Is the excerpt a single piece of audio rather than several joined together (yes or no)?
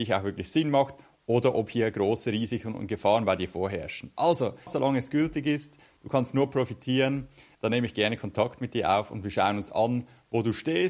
no